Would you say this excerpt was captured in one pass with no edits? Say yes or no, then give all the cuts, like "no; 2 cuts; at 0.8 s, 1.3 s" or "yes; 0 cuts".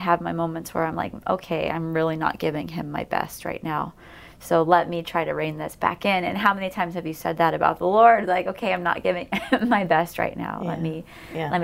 yes; 0 cuts